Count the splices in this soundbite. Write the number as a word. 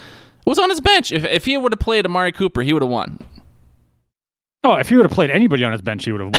zero